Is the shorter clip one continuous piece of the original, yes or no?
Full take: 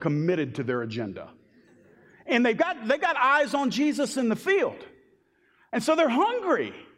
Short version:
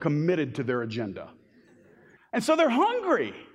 no